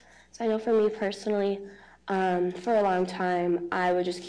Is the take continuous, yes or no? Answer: yes